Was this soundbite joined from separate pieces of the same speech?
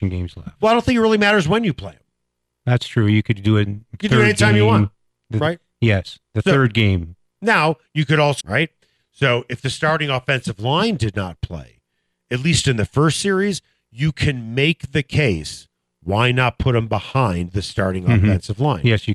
yes; 1 cut; at 8.4 s

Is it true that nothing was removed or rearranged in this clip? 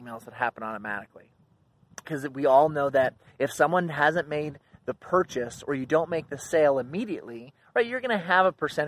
no; 1 cut; at 2.0 s

